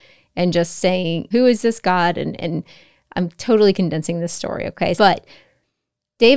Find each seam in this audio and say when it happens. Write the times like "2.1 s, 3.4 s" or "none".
1.3 s, 5.0 s